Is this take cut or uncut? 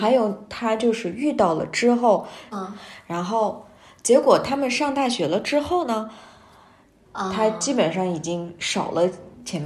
cut